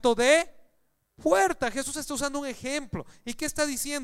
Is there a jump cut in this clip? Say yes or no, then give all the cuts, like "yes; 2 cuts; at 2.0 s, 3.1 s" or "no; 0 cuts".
no; 0 cuts